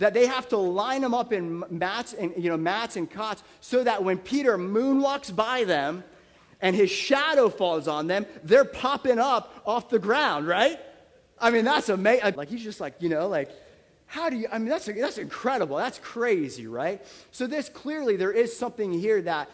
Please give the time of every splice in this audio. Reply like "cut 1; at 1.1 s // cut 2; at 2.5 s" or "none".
cut 1; at 12.4 s

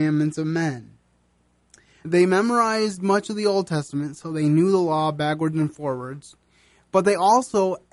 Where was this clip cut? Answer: cut 1; at 2.0 s

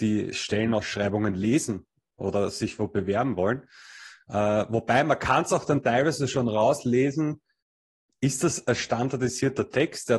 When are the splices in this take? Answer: none

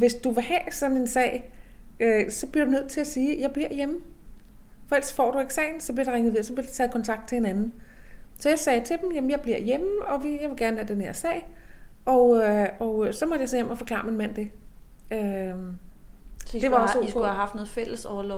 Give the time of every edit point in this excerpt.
none

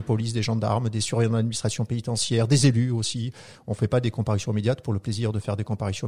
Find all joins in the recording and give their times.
cut 1; at 3.5 s

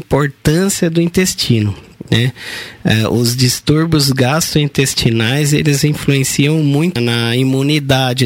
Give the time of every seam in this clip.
cut 1; at 7.0 s

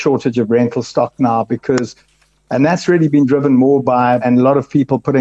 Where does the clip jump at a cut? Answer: cut 1; at 4.2 s

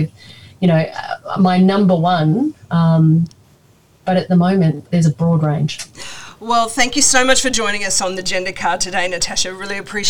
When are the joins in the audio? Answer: none

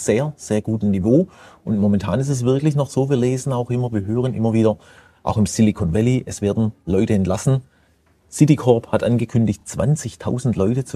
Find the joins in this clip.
none

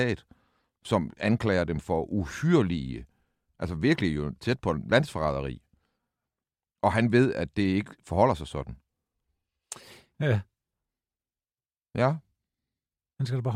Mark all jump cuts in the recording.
cut 1; at 10.1 s

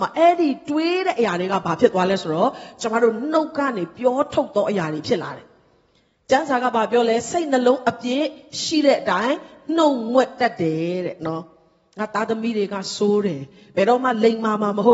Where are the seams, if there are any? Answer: none

